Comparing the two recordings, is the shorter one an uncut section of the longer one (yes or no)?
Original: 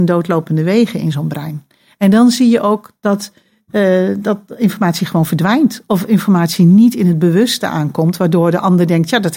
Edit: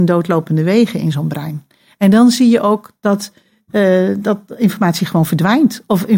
yes